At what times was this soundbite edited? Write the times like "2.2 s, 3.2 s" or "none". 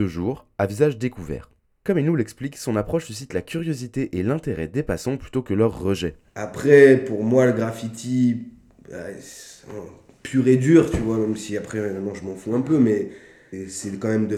none